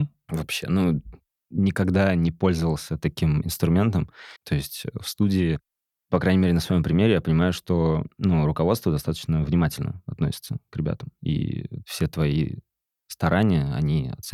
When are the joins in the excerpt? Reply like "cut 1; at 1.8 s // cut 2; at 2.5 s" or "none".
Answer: cut 1; at 4.4 s // cut 2; at 11.2 s